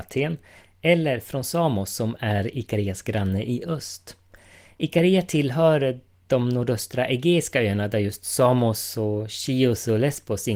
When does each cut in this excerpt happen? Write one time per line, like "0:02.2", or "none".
none